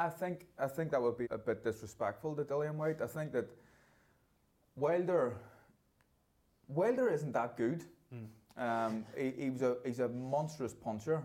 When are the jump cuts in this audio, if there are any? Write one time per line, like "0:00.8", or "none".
0:01.2